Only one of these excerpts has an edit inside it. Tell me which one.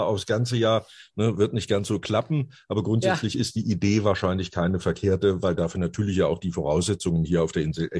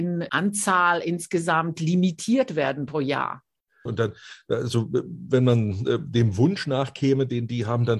second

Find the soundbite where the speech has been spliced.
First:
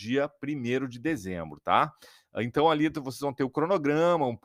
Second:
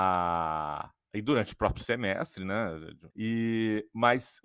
second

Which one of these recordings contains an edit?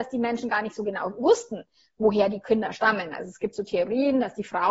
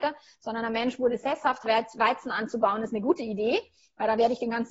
second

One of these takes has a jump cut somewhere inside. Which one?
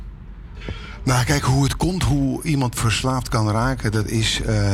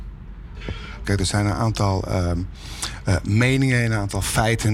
second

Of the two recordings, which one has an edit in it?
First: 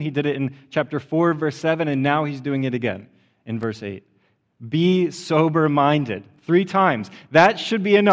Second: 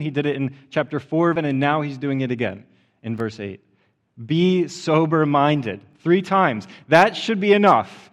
second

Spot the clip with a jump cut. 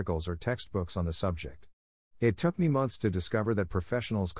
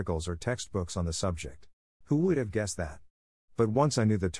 second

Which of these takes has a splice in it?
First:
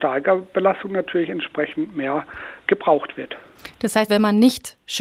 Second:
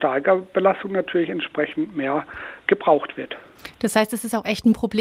first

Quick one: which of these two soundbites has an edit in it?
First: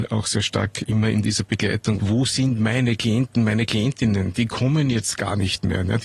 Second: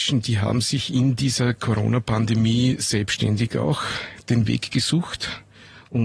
first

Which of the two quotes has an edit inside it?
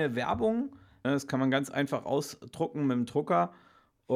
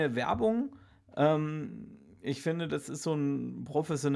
first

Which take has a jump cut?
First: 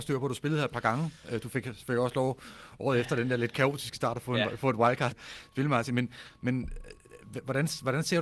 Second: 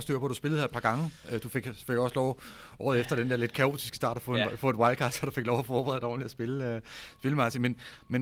first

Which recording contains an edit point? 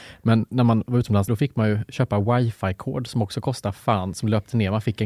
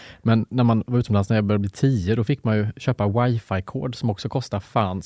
first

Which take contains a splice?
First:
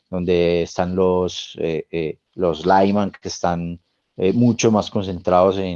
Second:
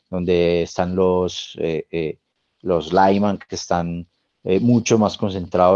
first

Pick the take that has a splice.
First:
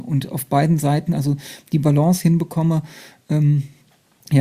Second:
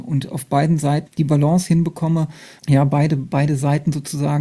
second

